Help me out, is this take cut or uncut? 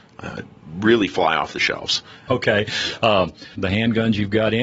cut